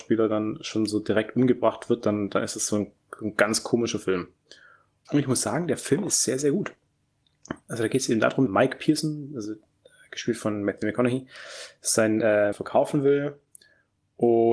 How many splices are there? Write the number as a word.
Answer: three